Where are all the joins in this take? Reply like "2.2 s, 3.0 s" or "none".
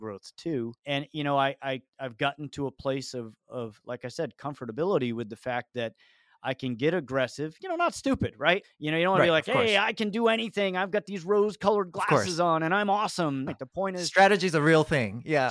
8.6 s, 13.5 s